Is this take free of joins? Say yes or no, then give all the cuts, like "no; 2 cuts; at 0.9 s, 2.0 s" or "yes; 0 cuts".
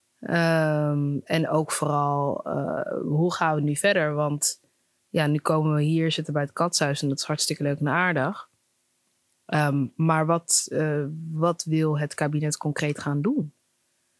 yes; 0 cuts